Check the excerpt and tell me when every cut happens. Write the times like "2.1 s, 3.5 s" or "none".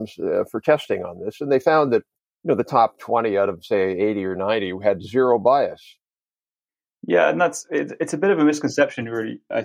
none